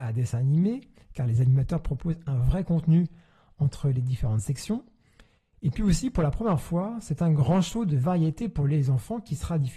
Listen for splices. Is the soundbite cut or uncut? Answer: uncut